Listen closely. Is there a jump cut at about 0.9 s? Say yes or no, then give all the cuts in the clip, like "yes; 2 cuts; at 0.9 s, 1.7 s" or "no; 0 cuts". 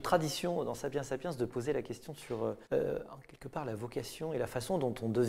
no; 1 cut; at 2.6 s